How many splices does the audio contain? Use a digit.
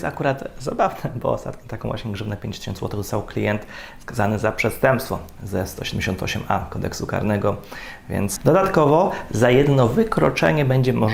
1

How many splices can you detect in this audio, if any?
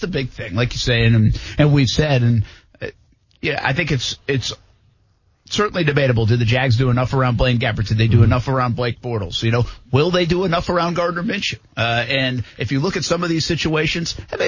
0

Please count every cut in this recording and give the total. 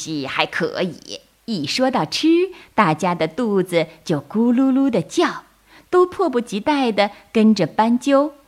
1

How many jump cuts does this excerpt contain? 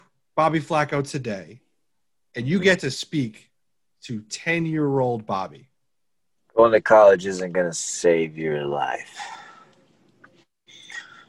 1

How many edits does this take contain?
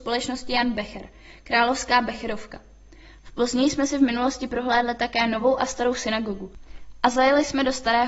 0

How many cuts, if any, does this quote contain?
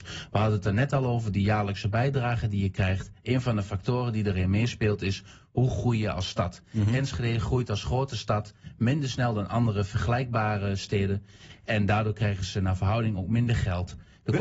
0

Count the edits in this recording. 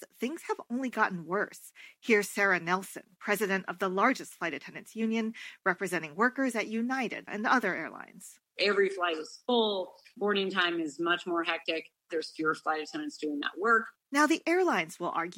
1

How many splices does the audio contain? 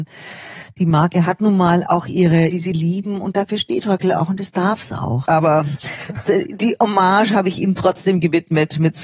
2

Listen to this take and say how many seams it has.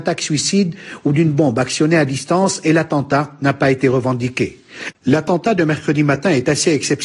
1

